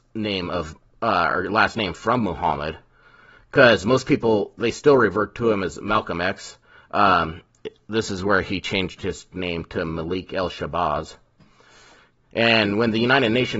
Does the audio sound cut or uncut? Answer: uncut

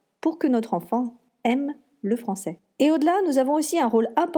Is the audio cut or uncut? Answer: uncut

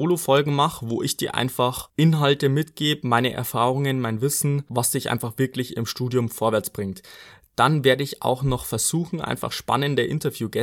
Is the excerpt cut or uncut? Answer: uncut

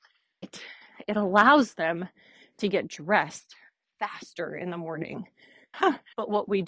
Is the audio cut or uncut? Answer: cut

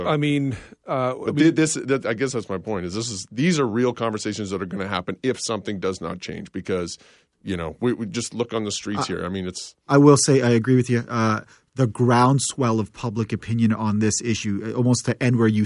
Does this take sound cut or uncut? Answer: uncut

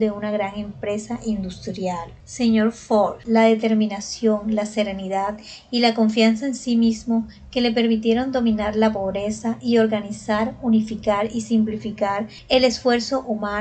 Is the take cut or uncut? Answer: cut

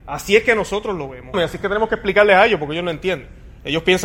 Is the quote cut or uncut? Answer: cut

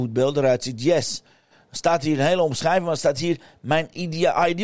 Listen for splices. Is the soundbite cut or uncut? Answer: uncut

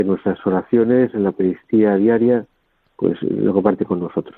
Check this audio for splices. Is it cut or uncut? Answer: uncut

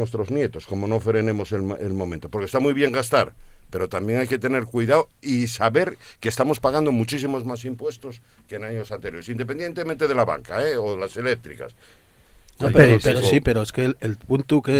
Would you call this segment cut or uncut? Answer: uncut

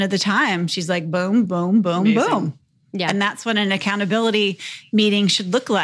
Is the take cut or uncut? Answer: cut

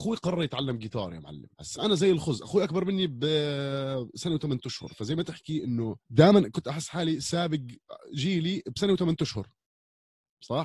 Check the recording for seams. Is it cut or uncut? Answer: cut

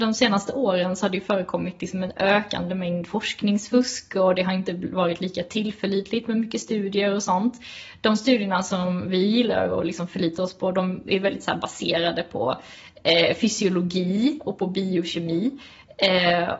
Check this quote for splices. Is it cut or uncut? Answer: uncut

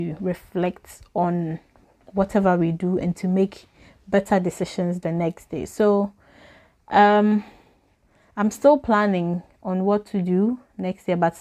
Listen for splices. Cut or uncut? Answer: uncut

